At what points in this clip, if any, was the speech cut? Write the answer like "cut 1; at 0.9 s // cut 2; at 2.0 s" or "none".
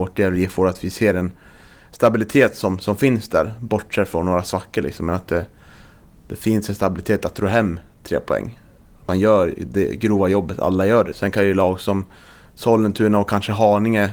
cut 1; at 11.1 s